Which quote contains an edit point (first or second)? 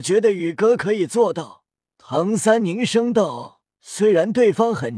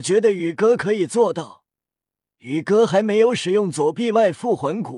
first